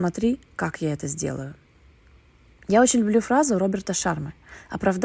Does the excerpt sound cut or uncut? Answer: uncut